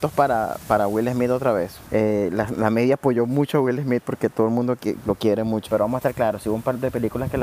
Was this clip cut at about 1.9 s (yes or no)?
yes